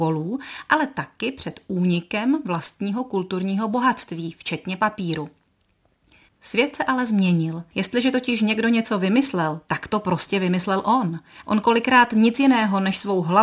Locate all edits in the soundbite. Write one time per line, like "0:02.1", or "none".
0:06.3
0:07.7
0:11.4